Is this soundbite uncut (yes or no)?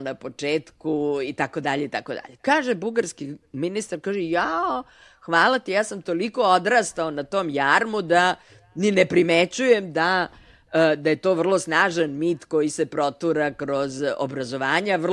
yes